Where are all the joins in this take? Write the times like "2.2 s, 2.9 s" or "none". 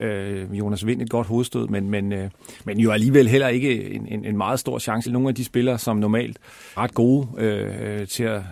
5.1 s, 6.8 s